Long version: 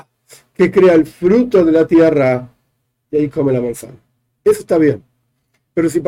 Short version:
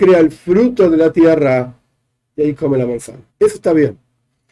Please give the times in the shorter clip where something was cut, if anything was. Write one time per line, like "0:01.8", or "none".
0:03.3